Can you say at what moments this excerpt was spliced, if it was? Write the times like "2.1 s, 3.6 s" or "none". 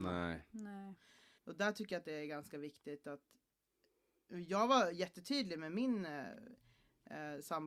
1.4 s